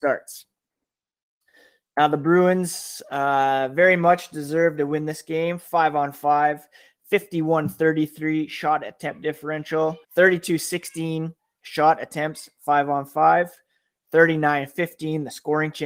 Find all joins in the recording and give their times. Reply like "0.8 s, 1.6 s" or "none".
10.0 s